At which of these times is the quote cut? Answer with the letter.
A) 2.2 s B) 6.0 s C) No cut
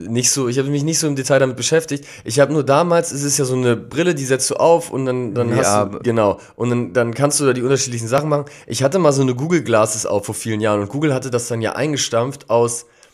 B